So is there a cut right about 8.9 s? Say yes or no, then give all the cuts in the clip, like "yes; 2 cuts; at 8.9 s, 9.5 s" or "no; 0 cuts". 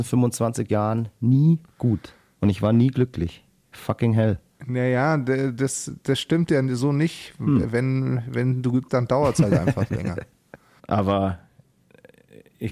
yes; 1 cut; at 8.9 s